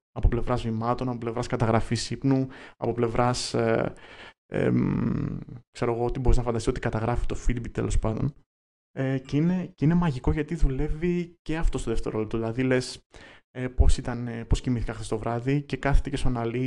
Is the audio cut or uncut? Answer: uncut